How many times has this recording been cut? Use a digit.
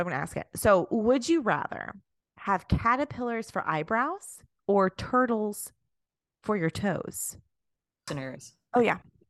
1